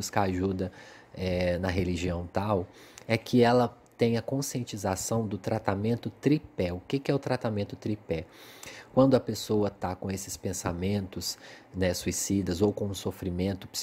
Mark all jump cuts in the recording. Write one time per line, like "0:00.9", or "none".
none